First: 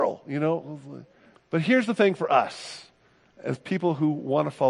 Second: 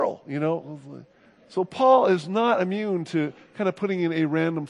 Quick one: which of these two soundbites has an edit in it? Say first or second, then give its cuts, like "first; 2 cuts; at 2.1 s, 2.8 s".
first; 1 cut; at 1.3 s